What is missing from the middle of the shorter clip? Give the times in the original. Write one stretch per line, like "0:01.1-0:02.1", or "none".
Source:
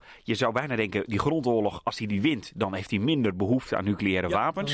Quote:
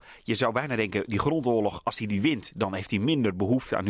none